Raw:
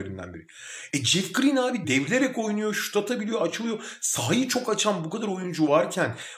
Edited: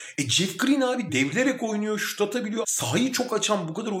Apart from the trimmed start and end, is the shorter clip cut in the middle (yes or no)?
yes